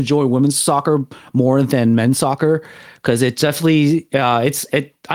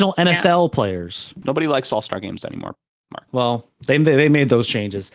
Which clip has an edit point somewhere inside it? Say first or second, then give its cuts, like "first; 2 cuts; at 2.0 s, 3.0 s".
second; 2 cuts; at 1.4 s, 3.3 s